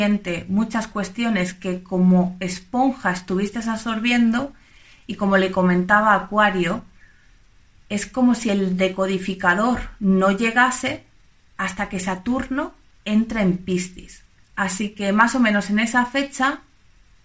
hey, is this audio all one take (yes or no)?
no